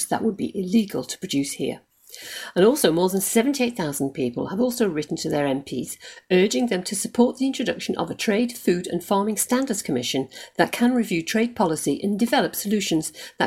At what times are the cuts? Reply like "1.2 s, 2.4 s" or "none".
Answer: none